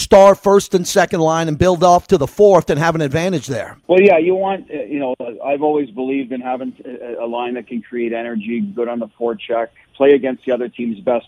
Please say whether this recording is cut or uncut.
cut